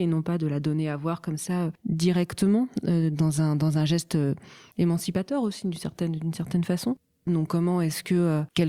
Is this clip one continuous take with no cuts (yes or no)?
no